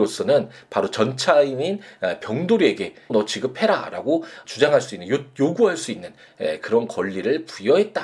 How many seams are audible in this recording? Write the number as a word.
two